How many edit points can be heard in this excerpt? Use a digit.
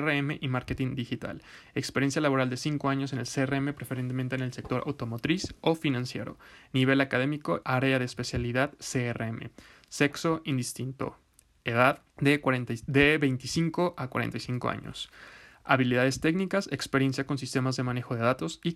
2